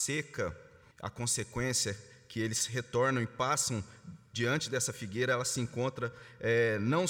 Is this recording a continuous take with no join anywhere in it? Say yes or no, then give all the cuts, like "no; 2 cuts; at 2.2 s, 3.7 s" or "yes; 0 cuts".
no; 1 cut; at 0.9 s